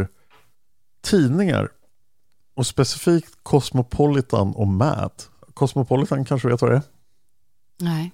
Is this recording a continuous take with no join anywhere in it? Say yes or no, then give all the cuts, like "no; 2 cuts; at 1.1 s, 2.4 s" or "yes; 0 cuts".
no; 1 cut; at 5.4 s